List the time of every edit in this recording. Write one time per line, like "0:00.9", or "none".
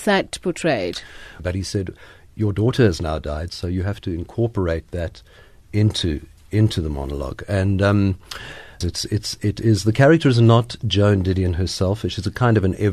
0:01.4
0:08.8